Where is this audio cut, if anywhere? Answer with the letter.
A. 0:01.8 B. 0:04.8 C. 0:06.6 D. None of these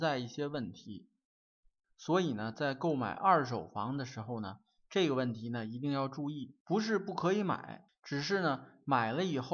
C